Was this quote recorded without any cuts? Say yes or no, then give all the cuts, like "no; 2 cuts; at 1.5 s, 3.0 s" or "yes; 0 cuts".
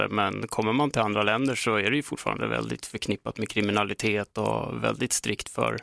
yes; 0 cuts